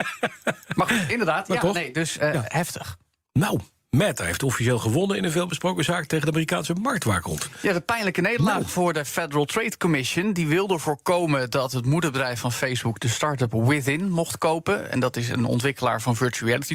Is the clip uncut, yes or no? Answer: yes